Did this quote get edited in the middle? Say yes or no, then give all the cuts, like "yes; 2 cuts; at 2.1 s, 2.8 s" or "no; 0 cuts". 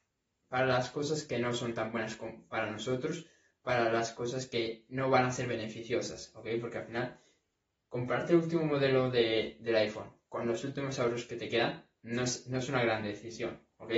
no; 0 cuts